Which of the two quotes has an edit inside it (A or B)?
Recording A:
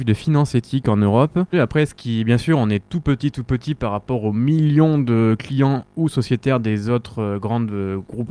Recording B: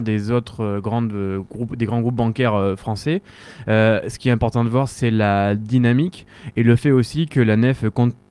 A